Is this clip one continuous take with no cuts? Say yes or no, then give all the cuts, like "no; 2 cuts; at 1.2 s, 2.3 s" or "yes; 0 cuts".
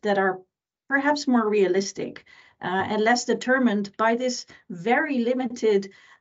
yes; 0 cuts